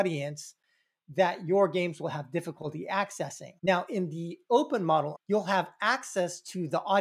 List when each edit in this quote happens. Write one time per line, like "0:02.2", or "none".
0:03.6
0:05.1